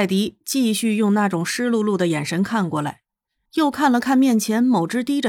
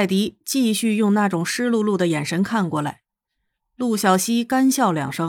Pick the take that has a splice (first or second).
first